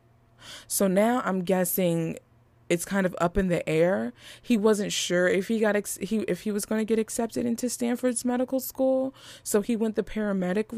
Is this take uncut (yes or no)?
yes